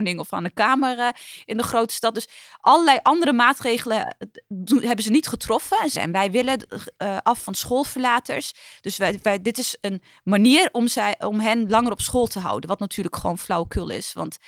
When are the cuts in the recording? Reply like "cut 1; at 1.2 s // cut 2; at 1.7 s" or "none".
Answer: cut 1; at 6.0 s